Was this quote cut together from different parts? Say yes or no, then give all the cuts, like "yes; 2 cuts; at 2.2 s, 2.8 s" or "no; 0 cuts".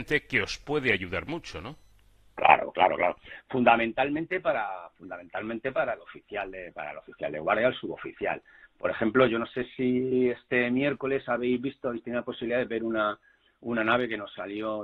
no; 0 cuts